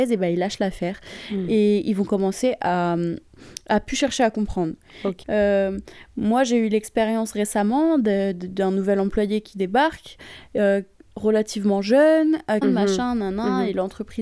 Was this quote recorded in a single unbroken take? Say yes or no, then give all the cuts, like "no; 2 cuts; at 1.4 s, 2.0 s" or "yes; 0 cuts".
no; 2 cuts; at 5.2 s, 12.6 s